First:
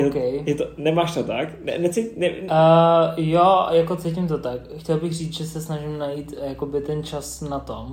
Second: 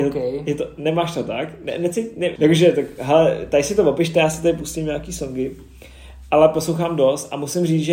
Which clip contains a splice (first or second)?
second